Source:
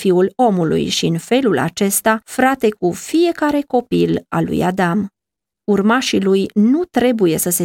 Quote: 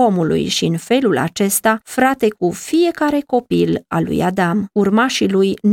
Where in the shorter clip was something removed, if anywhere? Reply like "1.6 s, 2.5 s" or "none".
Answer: 4.7 s